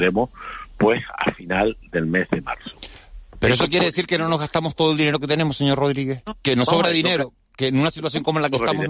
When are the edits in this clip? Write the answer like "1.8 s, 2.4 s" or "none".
none